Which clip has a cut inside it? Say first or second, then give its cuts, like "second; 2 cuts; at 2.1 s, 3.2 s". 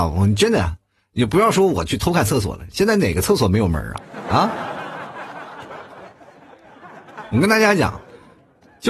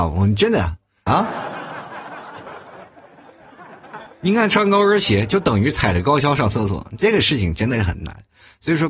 second; 2 cuts; at 1.1 s, 4.1 s